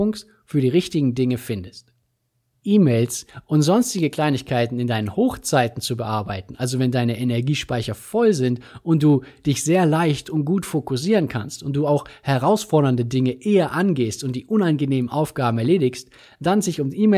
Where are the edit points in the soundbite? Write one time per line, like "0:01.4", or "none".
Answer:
none